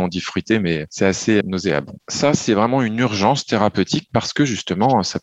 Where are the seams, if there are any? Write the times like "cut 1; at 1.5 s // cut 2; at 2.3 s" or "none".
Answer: cut 1; at 1.4 s